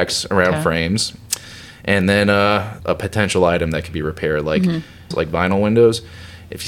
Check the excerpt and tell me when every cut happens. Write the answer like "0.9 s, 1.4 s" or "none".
2.8 s, 5.1 s